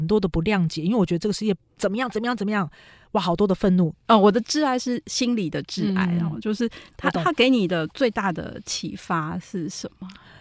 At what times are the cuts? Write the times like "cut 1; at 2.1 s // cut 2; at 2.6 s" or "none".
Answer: cut 1; at 3.9 s